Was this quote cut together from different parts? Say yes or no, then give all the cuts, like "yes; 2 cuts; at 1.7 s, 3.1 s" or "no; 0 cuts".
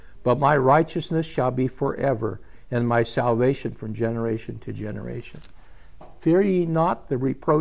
yes; 1 cut; at 6.0 s